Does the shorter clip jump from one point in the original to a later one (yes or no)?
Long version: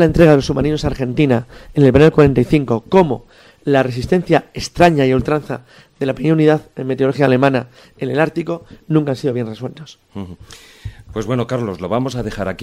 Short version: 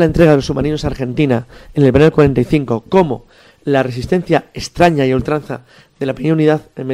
no